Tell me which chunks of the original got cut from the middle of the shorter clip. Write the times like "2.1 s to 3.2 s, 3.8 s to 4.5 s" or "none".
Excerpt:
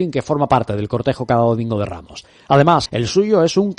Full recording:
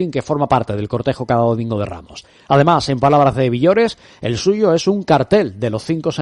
2.9 s to 4.2 s